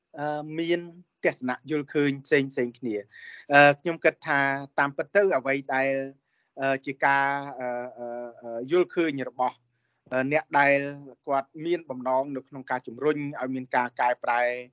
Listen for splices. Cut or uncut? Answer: uncut